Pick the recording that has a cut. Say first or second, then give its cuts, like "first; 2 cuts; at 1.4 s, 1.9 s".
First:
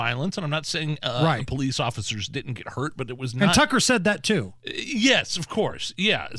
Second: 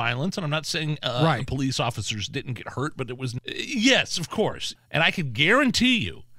second; 2 cuts; at 3.4 s, 4.8 s